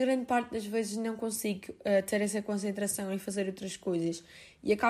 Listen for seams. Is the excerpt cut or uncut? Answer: uncut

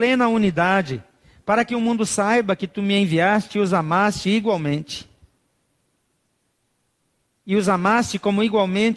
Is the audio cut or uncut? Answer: uncut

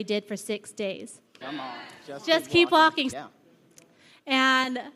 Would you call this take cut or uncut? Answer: cut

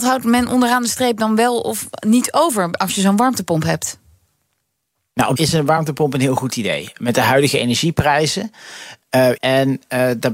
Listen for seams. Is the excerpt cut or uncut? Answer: cut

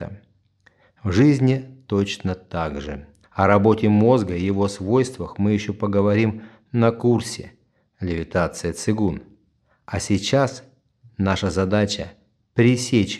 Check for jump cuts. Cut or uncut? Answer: cut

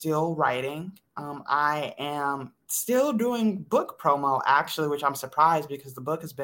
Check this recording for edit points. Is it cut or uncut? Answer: cut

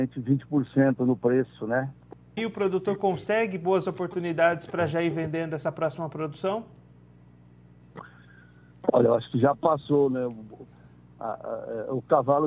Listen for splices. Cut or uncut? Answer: cut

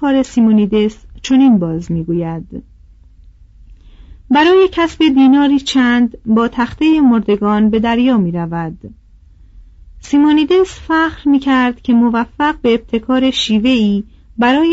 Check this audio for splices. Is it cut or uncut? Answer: uncut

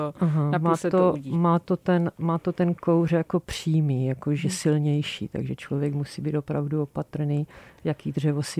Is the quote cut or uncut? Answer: uncut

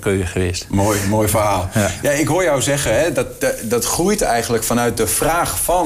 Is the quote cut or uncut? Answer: uncut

